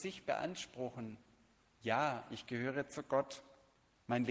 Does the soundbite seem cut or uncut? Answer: uncut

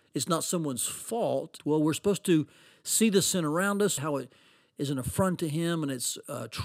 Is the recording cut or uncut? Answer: cut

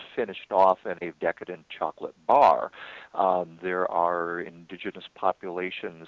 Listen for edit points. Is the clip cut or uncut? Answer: cut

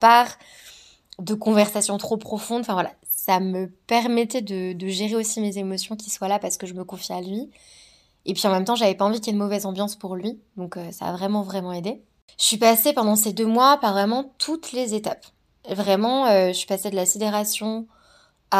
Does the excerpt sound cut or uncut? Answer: uncut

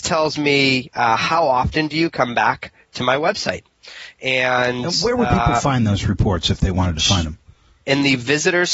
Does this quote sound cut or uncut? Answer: cut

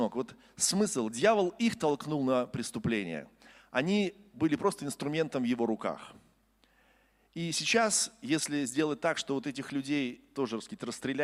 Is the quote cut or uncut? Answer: uncut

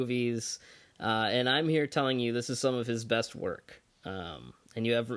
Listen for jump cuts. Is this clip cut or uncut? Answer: uncut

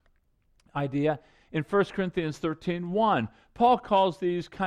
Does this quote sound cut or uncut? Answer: uncut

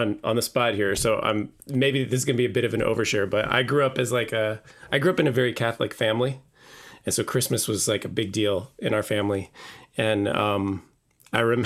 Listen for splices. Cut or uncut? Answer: uncut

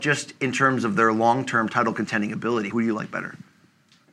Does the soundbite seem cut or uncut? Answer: uncut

